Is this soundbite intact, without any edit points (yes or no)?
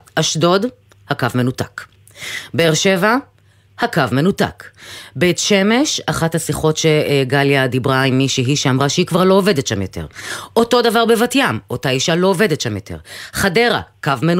yes